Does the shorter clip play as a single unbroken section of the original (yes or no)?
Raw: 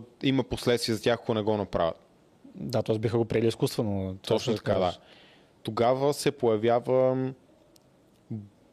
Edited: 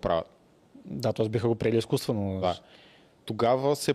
no